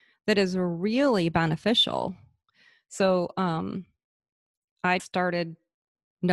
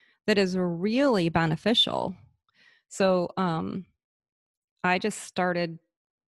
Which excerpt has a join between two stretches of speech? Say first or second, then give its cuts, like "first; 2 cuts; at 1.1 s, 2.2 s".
first; 1 cut; at 5.0 s